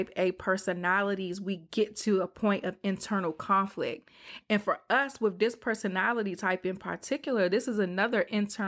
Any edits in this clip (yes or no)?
yes